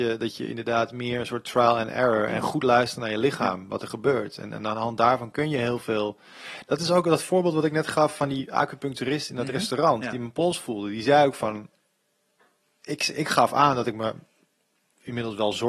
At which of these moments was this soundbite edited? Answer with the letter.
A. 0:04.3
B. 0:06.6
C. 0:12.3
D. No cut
D